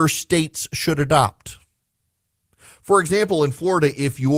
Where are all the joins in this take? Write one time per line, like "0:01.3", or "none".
none